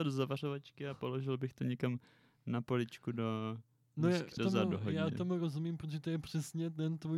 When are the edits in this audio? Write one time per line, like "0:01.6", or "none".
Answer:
0:04.4